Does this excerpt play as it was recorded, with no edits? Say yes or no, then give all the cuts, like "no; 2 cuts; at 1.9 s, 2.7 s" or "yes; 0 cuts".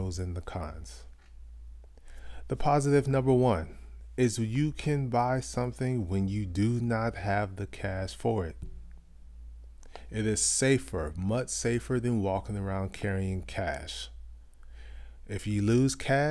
yes; 0 cuts